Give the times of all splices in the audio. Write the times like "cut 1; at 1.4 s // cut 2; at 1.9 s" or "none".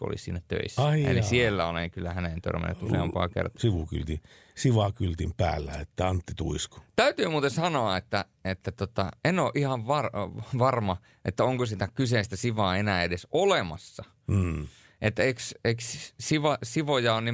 cut 1; at 3.6 s